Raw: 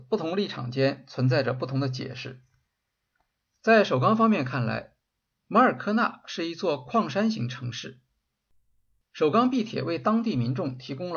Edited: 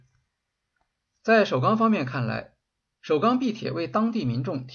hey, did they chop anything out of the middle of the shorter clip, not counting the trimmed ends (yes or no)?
yes